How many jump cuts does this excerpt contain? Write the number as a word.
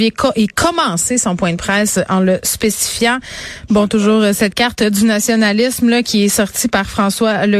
one